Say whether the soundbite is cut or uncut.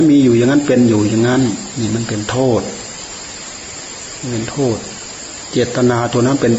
uncut